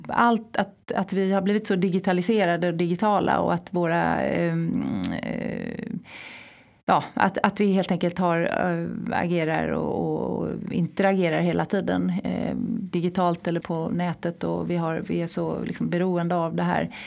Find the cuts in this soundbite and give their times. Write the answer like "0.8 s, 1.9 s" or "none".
13.6 s